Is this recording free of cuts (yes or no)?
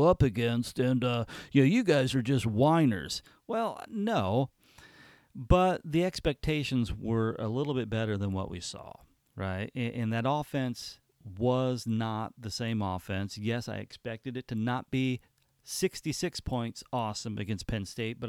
yes